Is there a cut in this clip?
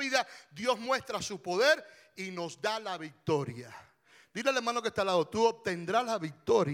no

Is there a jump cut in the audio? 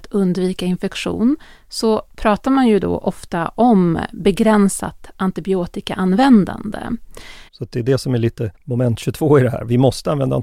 yes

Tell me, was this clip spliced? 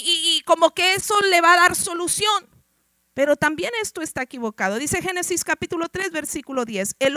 no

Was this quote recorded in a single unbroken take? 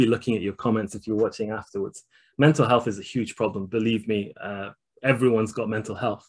yes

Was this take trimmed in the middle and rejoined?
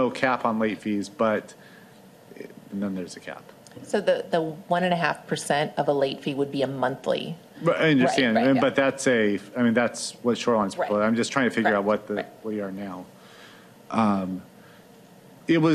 yes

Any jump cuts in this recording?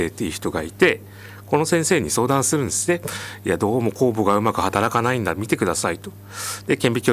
no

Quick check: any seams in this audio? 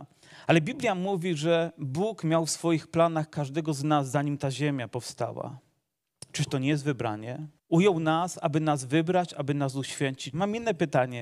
yes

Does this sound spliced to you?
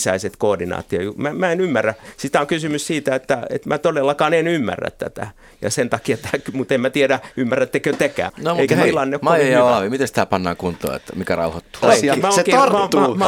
yes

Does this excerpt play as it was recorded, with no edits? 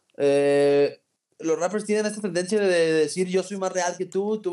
yes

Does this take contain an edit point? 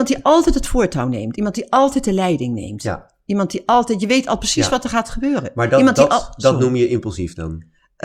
no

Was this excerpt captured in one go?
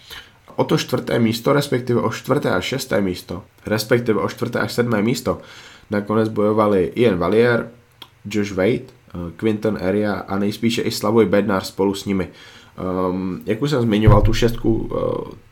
no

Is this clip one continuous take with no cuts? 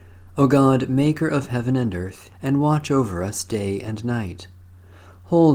no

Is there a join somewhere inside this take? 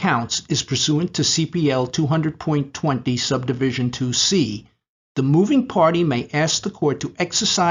yes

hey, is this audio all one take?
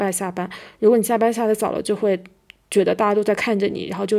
yes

